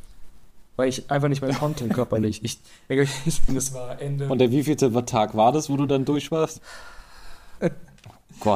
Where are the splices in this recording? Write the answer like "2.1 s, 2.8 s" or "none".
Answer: 3.5 s, 7.6 s